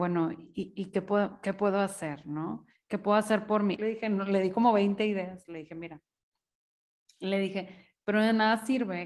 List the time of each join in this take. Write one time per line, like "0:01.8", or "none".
0:03.8